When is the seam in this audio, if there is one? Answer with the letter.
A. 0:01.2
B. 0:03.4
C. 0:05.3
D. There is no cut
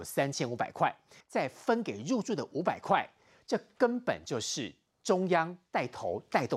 A